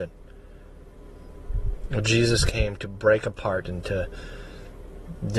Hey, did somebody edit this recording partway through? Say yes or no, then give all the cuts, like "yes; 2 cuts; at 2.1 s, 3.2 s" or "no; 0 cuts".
yes; 1 cut; at 3.6 s